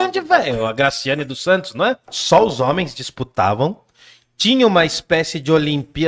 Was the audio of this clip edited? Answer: yes; 1 cut; at 2.0 s

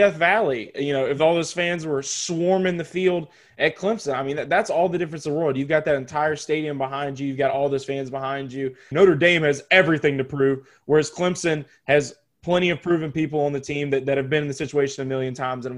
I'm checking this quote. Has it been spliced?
yes; 1 cut; at 8.9 s

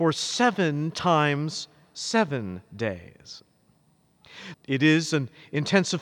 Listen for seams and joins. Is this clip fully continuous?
no; 1 cut; at 4.5 s

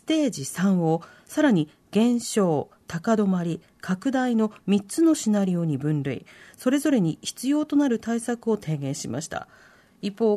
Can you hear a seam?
no; 0 cuts

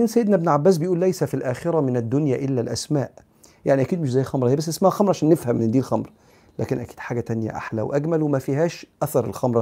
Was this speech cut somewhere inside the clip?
no; 0 cuts

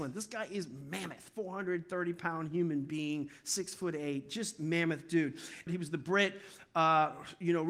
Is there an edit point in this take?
yes; 1 cut; at 5.7 s

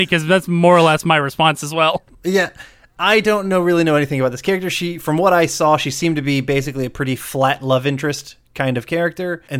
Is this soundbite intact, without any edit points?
yes; 0 cuts

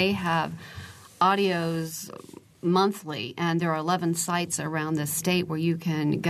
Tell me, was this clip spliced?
no; 0 cuts

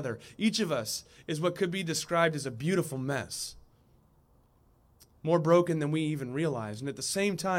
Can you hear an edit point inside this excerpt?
no; 0 cuts

